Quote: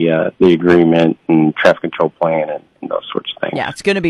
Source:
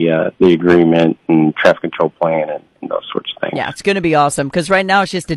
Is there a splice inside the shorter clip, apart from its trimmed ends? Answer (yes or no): no